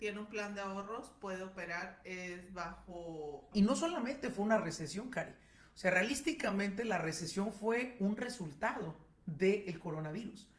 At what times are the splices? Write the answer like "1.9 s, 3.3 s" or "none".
3.5 s

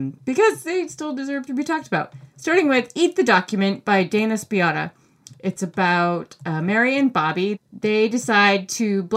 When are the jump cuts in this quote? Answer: 7.6 s

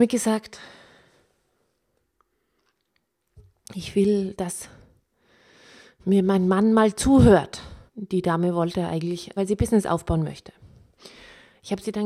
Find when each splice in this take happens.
7.9 s, 9.4 s

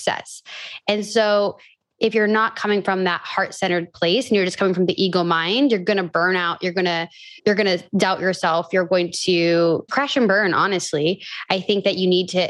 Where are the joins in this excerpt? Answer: 7.4 s, 9.9 s

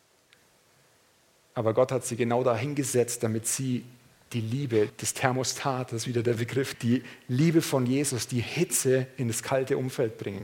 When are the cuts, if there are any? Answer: 4.9 s, 6.7 s

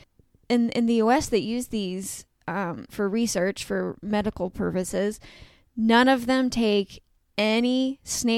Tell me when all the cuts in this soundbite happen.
2.9 s

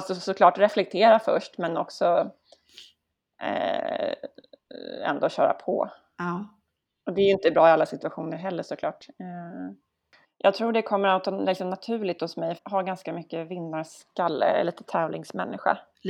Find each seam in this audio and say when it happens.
10.2 s, 12.6 s

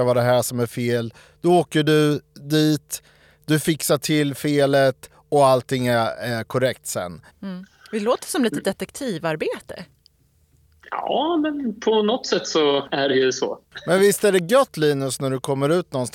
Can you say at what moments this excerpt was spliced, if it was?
7.3 s

